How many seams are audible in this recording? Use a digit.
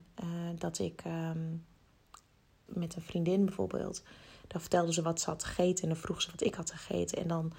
1